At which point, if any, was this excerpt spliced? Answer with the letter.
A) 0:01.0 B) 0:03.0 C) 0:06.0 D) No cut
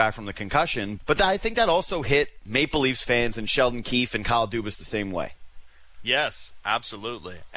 A